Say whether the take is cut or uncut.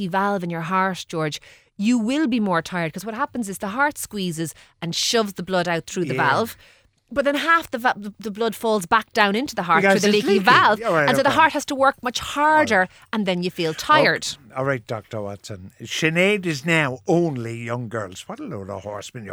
uncut